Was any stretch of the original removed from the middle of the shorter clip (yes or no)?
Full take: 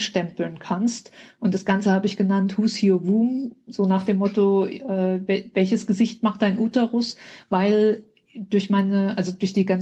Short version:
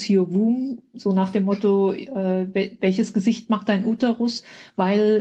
no